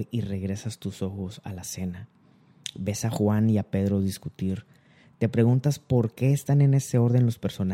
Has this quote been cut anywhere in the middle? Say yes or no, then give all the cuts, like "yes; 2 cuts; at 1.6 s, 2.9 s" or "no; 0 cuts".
no; 0 cuts